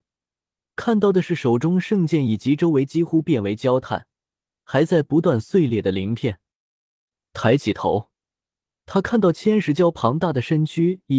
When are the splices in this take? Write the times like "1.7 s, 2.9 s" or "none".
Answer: none